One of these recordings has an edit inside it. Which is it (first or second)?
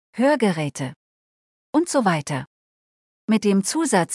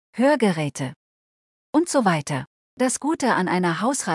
second